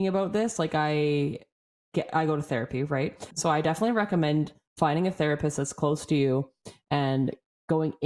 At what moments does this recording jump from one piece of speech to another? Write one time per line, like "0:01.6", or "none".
0:03.3